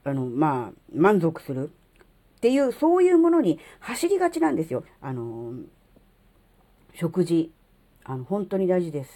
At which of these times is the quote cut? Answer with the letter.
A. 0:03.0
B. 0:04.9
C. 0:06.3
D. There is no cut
B